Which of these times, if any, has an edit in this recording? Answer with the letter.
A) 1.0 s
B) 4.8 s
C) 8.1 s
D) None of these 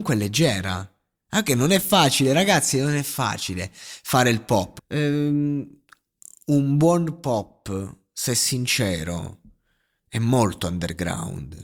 B